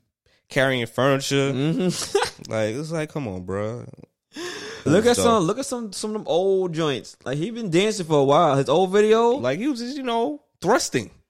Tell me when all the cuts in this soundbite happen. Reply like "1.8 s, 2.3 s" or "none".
4.9 s, 9.4 s